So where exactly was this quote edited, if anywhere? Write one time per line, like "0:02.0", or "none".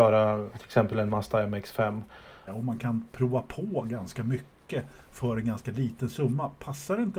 0:02.5